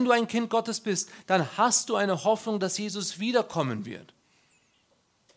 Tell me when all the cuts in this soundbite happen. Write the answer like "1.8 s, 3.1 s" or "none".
none

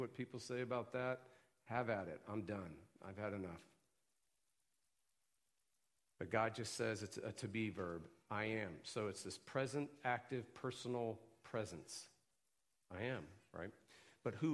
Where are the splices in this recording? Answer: none

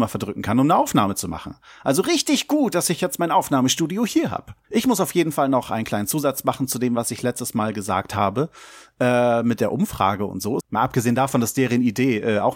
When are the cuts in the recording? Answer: 4.6 s, 10.6 s

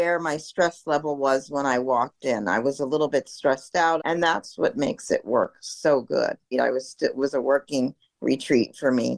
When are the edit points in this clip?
4.0 s, 6.5 s

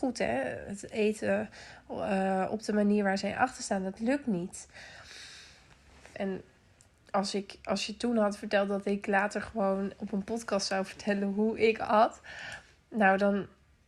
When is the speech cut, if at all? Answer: 6.1 s

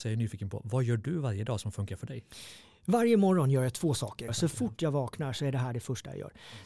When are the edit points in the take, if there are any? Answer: 4.3 s

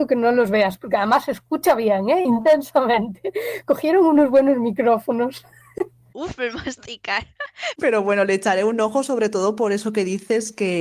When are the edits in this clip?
6.1 s, 7.7 s

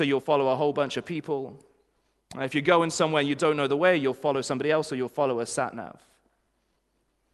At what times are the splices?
none

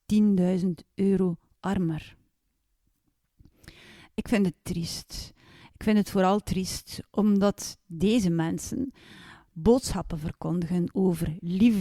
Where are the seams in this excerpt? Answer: none

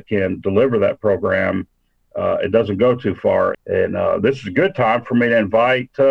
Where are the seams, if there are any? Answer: 3.5 s

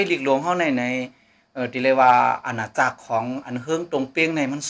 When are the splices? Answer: none

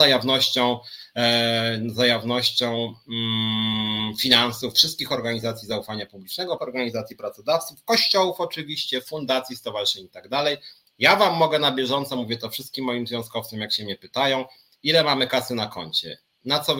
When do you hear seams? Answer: 6.6 s

